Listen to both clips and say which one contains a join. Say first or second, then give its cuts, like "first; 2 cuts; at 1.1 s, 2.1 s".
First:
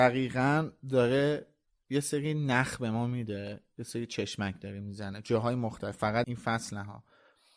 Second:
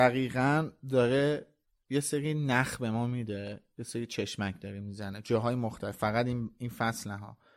first; 1 cut; at 6.2 s